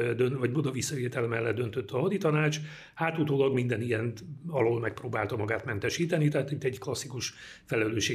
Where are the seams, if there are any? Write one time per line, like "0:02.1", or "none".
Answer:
none